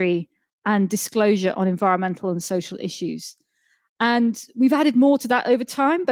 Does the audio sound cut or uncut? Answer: uncut